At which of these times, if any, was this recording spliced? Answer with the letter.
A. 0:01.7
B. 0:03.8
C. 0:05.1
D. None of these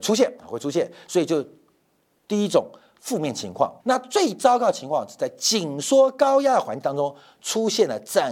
B